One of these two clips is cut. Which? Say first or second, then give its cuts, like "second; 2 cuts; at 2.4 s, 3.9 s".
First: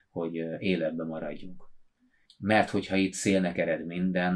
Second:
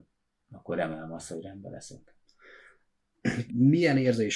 second; 1 cut; at 3.5 s